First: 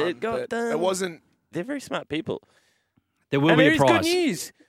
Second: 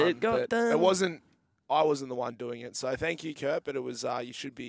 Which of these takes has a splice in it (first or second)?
first